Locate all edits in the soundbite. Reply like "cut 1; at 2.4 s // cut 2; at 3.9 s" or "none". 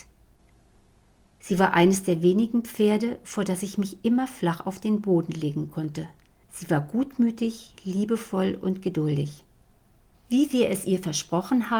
cut 1; at 6.4 s // cut 2; at 10.1 s

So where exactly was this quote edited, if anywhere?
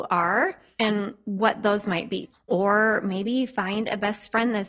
cut 1; at 2.3 s

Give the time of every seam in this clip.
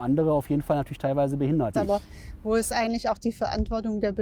cut 1; at 1.7 s

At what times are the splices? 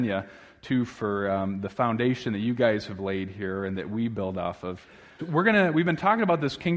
cut 1; at 5.2 s

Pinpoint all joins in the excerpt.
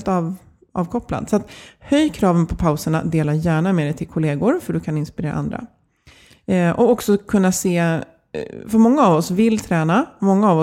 none

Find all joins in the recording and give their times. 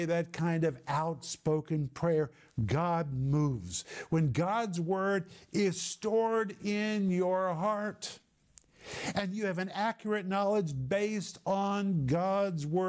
none

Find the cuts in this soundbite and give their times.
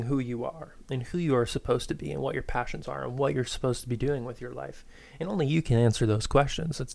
none

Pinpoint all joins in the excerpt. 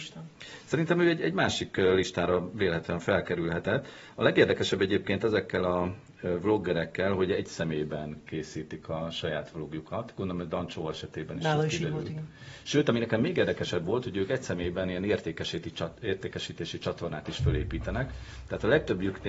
none

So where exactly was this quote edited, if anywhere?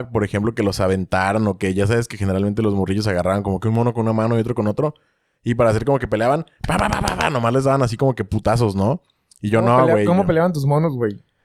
none

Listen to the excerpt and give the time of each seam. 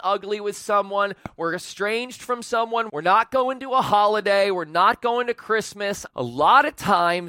cut 1; at 2.9 s // cut 2; at 6.1 s

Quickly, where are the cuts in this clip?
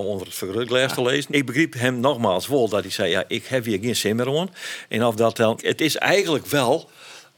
cut 1; at 1.3 s // cut 2; at 5.6 s

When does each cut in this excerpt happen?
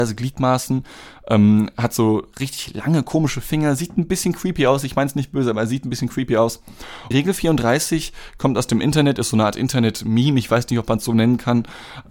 cut 1; at 7.1 s

